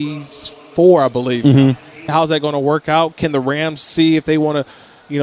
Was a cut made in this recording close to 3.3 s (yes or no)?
no